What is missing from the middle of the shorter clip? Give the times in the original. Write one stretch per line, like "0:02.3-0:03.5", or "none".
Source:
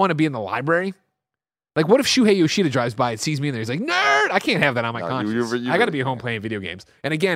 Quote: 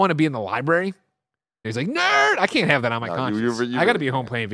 0:01.6-0:03.6